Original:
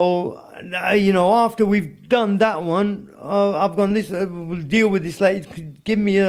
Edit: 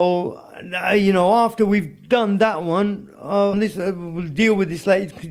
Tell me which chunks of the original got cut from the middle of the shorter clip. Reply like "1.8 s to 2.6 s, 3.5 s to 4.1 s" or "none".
3.5 s to 3.9 s